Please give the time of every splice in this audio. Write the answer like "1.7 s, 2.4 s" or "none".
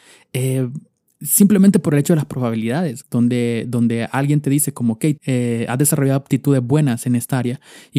3.0 s, 5.2 s